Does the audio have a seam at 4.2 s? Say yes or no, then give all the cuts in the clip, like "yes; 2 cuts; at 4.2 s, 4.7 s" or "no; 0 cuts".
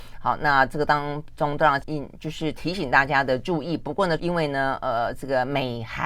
yes; 2 cuts; at 1.8 s, 4.2 s